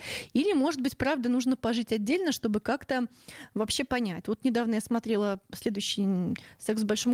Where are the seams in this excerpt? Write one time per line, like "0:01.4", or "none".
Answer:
0:04.2